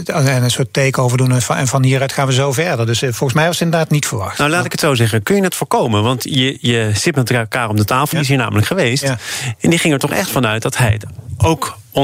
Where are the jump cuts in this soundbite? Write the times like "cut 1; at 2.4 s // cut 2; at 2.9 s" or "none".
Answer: cut 1; at 8.1 s